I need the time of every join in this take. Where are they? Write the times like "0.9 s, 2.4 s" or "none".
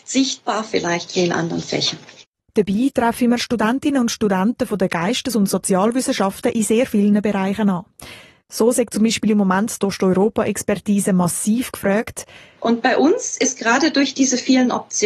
12.6 s